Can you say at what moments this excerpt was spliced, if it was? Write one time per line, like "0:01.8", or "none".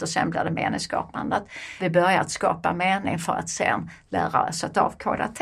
0:01.8